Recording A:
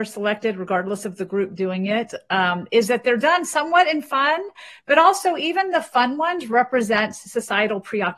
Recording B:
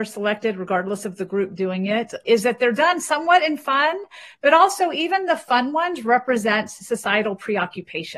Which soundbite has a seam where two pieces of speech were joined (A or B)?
B